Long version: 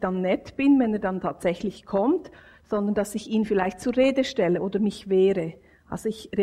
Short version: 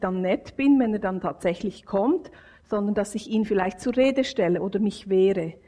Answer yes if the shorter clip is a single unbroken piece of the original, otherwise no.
yes